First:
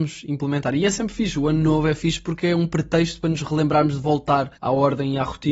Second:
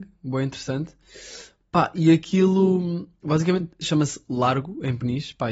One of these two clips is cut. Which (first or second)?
first